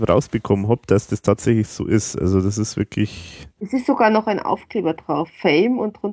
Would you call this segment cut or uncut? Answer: uncut